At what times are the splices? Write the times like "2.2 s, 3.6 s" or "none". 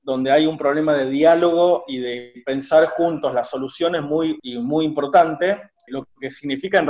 4.4 s, 5.9 s